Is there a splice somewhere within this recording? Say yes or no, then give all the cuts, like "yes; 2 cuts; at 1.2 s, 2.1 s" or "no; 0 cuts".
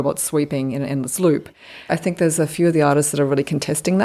yes; 1 cut; at 1.9 s